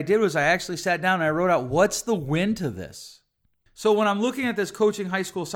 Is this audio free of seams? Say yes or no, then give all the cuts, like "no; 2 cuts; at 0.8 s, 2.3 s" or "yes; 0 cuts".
no; 1 cut; at 3.7 s